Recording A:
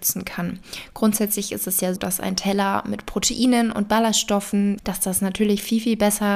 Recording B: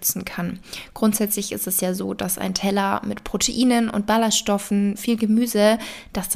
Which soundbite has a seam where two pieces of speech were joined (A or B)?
A